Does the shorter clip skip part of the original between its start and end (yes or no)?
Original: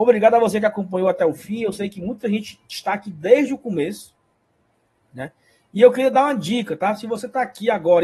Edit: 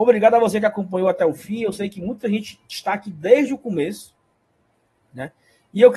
no